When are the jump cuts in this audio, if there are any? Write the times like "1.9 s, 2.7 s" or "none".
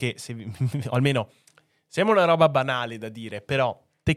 none